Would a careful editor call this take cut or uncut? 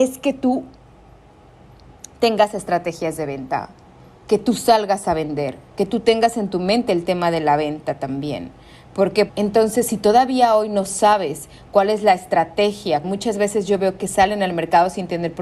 cut